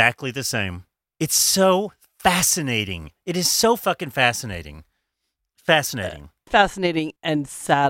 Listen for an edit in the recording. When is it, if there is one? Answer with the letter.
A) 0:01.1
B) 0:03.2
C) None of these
C